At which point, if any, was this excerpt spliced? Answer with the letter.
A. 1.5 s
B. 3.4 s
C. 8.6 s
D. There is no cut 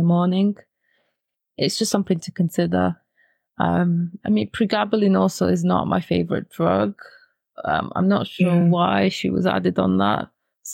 D